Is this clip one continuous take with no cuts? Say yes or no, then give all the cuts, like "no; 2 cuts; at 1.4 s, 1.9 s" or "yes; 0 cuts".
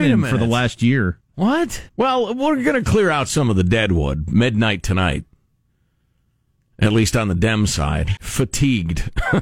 no; 2 cuts; at 1.9 s, 8.2 s